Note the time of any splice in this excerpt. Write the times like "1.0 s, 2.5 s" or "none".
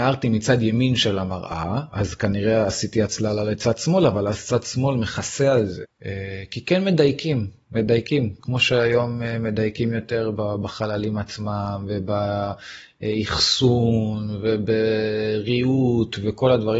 5.8 s, 10.4 s